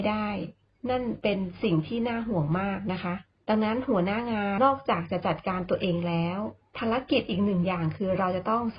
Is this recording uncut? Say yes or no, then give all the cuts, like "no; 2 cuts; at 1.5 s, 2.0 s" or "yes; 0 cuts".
no; 1 cut; at 4.6 s